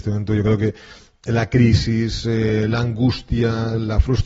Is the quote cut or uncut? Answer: uncut